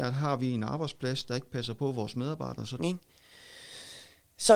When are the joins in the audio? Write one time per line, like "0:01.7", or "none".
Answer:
0:02.8